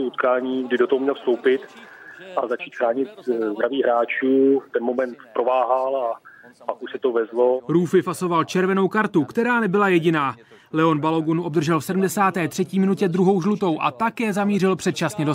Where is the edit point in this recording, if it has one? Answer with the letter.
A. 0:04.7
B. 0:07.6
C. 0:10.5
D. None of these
D